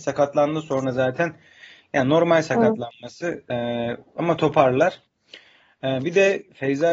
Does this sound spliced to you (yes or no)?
no